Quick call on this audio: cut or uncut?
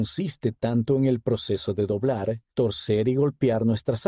cut